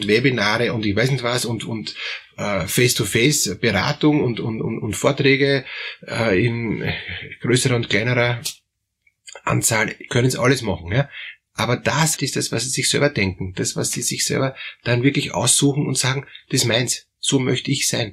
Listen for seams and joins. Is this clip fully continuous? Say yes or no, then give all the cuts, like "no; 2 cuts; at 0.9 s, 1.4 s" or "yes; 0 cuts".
no; 1 cut; at 12.2 s